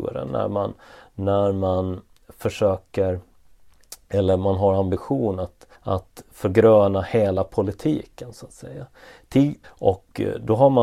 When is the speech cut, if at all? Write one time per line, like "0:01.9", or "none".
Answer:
0:05.7
0:09.6